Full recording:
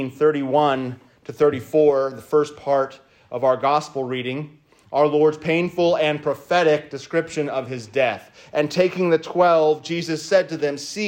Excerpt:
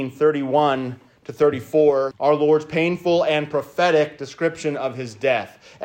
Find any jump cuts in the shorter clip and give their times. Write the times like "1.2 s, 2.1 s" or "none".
2.1 s